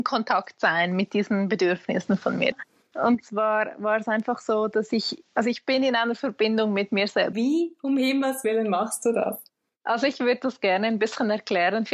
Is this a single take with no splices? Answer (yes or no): no